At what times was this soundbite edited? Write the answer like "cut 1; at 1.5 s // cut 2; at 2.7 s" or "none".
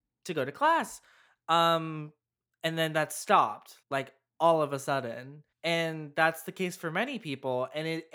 cut 1; at 3.8 s // cut 2; at 5.5 s